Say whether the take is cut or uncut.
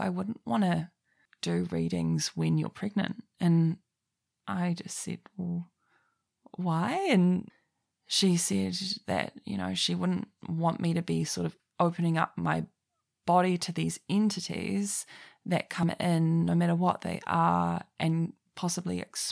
uncut